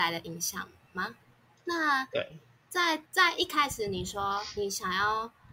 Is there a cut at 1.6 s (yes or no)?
yes